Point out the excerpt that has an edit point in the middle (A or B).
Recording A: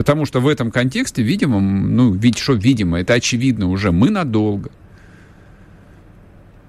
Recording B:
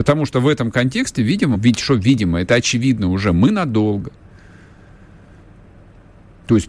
B